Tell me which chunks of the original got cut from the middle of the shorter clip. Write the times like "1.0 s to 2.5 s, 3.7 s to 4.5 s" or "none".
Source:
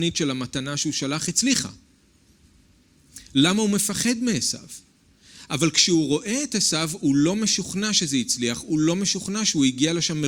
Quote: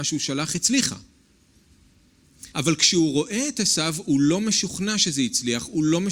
3.2 s to 5.5 s